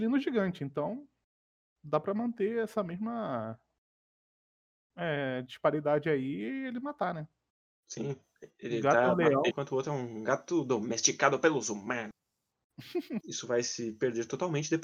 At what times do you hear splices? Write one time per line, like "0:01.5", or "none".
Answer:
0:09.5
0:13.2